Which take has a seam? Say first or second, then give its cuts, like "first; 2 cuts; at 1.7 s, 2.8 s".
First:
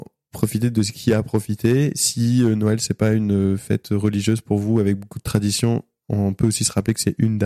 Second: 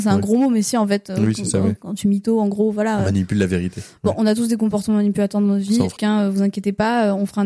second; 1 cut; at 6.0 s